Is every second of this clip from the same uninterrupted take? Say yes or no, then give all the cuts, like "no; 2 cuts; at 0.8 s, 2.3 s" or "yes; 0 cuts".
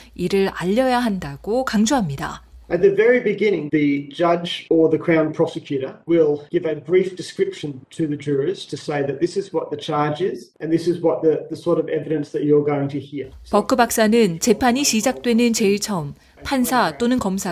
no; 1 cut; at 3.7 s